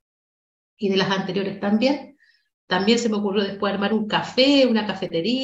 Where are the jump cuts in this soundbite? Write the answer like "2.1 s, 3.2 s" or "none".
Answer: 2.5 s